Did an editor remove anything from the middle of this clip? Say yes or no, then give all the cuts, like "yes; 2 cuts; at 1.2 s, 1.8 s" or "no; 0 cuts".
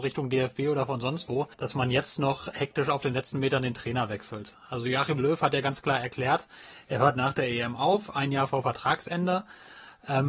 yes; 1 cut; at 1.5 s